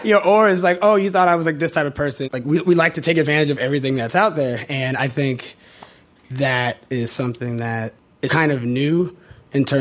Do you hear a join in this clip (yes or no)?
yes